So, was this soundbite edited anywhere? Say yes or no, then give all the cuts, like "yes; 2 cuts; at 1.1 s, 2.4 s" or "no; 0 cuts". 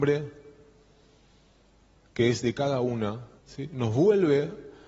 yes; 1 cut; at 3.4 s